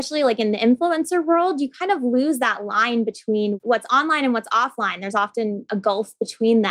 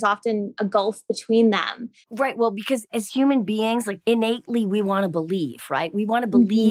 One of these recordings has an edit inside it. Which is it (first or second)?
second